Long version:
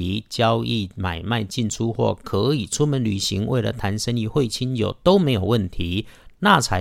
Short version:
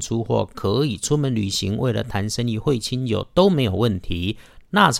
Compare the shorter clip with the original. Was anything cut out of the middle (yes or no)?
no